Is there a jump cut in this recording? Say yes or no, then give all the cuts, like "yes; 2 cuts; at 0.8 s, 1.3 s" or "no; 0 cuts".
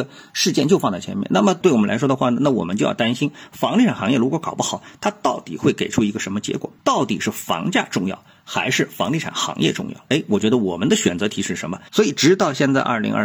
yes; 2 cuts; at 10.1 s, 11.9 s